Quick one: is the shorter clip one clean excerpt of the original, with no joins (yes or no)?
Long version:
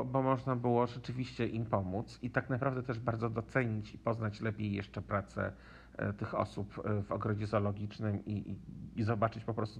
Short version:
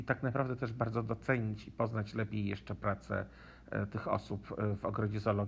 yes